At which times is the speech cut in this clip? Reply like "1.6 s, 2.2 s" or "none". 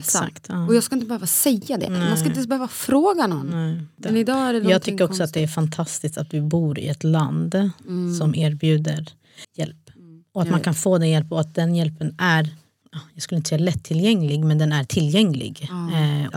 9.4 s